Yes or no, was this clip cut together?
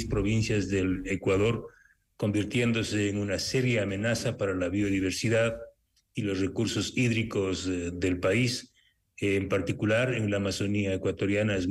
no